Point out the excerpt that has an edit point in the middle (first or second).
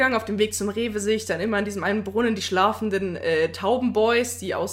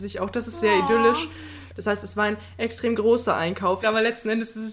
second